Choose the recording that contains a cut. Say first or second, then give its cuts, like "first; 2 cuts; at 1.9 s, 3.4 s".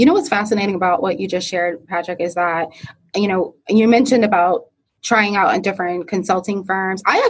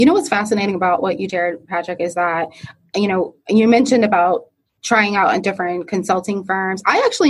second; 1 cut; at 1.3 s